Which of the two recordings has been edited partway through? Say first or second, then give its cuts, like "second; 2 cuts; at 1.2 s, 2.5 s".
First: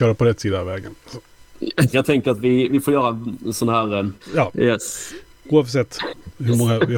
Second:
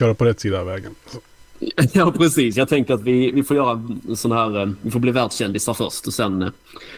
first; 2 cuts; at 1.9 s, 4.1 s